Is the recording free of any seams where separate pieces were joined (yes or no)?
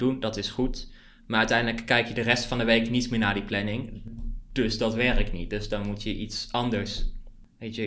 yes